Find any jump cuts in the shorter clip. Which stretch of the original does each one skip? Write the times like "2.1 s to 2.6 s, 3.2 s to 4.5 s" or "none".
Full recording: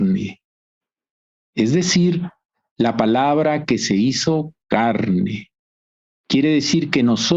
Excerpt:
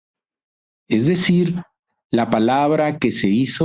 none